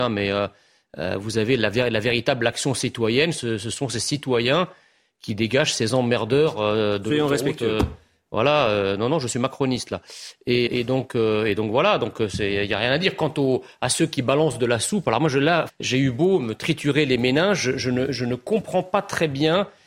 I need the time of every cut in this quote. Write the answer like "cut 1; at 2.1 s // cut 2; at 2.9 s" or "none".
cut 1; at 10.7 s // cut 2; at 15.7 s